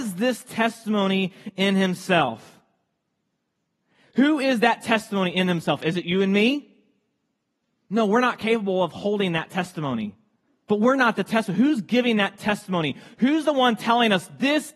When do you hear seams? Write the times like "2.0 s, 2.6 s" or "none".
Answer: 10.5 s